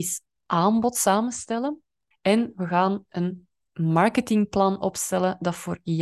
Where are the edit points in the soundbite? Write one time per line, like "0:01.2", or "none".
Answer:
0:02.1

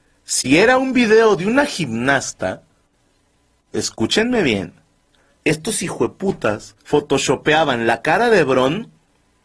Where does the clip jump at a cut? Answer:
0:05.3
0:06.8

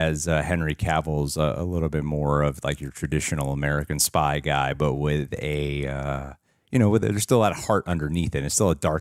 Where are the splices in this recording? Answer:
none

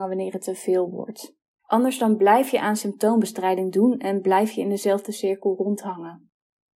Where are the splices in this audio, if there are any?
0:01.6

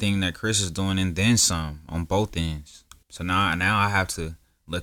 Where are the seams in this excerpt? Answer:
0:03.0

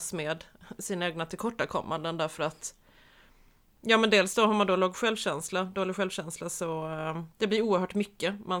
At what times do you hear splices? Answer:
0:07.3

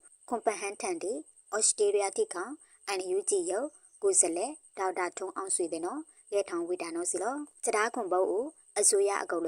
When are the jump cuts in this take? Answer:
0:07.6

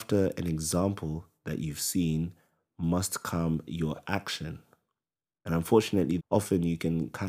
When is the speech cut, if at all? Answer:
0:06.2

